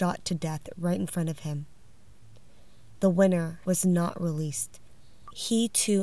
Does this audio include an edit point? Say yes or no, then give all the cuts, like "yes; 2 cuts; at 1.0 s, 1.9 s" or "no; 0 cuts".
yes; 1 cut; at 3.6 s